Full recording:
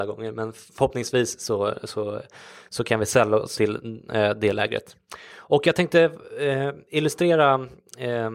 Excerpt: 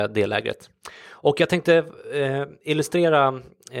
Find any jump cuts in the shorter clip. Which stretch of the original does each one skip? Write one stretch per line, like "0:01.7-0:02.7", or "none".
none